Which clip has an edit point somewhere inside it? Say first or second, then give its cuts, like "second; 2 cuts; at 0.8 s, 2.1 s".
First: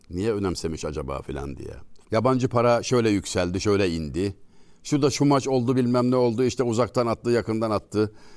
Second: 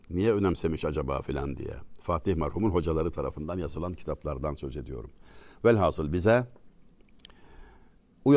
first; 1 cut; at 2.0 s